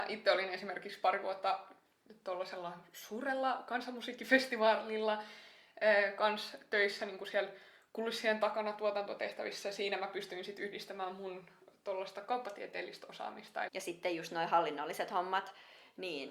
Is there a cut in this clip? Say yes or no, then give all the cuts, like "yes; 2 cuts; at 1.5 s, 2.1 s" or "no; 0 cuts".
yes; 1 cut; at 13.7 s